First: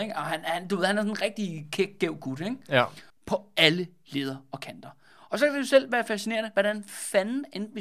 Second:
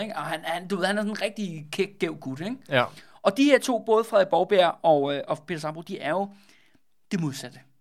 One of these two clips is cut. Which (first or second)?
first